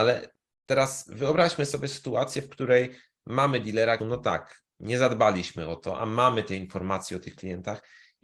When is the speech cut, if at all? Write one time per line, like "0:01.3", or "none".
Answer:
0:04.0